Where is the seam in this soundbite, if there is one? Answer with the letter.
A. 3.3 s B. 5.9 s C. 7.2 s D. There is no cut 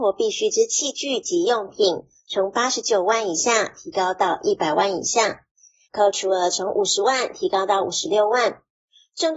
B